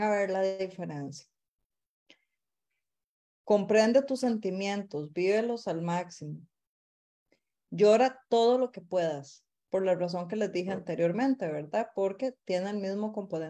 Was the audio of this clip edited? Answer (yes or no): no